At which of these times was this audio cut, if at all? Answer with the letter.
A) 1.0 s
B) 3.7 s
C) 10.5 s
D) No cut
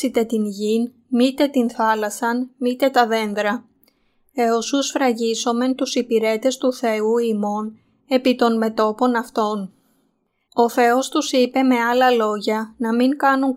C